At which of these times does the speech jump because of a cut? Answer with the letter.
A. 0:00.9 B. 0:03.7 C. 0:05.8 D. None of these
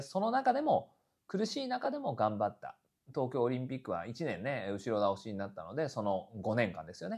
D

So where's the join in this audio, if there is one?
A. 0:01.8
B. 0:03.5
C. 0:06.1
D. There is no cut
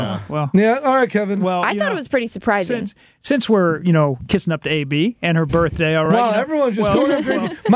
D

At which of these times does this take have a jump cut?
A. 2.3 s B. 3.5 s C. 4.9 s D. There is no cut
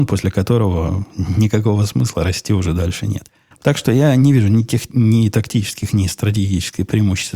B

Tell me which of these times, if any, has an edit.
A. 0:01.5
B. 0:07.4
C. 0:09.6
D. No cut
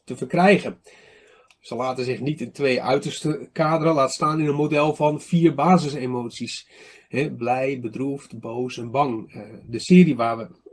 A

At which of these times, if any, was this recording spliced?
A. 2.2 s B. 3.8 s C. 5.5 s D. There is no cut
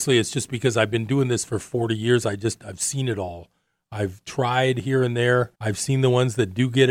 C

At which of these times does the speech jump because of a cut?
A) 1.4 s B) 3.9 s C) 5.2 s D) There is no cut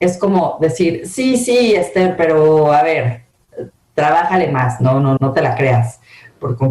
C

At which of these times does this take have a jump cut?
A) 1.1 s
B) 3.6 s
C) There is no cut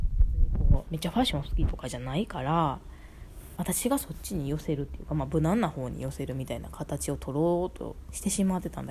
B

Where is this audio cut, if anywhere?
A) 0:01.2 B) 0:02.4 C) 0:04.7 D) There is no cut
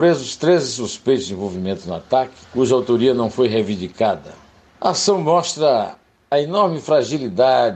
B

